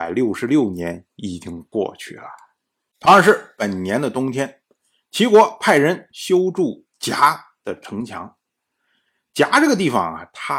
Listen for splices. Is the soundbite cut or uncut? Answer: uncut